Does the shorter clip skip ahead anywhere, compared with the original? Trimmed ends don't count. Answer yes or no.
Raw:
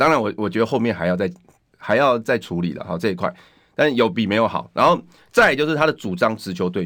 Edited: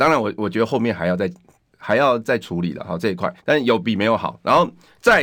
yes